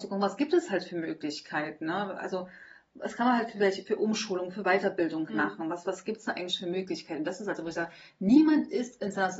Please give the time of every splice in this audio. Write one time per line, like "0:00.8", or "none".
0:05.3